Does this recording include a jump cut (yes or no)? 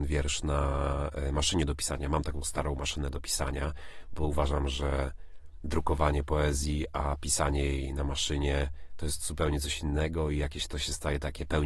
no